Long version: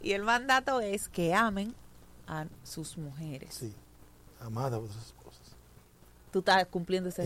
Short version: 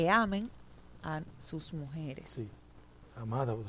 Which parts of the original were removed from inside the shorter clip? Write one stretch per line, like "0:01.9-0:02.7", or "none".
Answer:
none